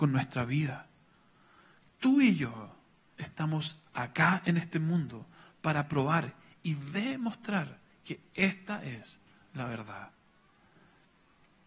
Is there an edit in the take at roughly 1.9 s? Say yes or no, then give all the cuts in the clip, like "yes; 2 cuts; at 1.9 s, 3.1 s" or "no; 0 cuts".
no; 0 cuts